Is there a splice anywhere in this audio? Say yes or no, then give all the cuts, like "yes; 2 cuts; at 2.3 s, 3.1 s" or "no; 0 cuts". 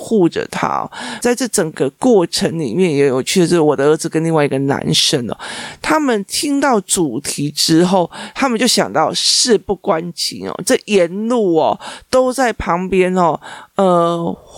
yes; 1 cut; at 1.2 s